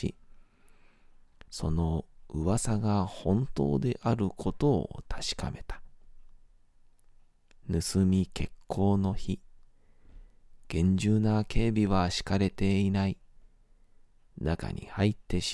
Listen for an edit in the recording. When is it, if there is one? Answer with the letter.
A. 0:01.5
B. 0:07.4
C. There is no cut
A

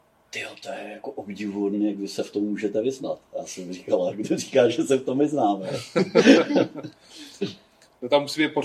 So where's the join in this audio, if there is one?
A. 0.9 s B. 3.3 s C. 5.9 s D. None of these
D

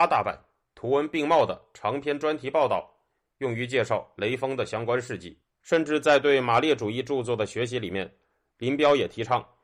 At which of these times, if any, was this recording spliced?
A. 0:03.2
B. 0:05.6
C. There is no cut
B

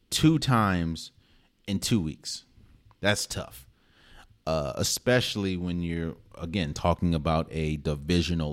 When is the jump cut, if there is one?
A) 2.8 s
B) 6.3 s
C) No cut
C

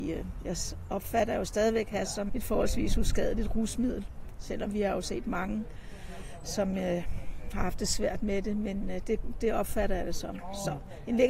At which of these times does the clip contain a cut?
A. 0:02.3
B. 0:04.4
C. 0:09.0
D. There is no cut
A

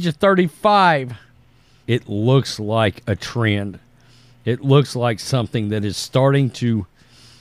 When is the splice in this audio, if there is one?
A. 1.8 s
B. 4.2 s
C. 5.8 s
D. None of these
A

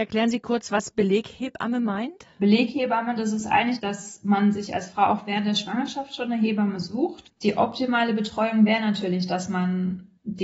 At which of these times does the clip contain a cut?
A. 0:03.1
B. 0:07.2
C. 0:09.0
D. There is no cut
B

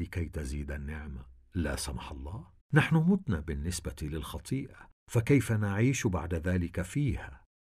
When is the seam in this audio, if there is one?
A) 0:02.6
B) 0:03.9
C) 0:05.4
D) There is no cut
A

